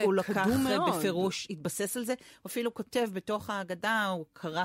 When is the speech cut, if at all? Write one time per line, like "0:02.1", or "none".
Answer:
none